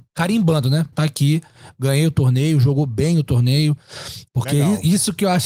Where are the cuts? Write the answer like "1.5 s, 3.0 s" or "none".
0.9 s, 4.3 s

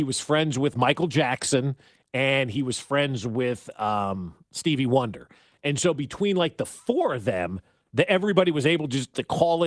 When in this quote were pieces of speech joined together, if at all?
none

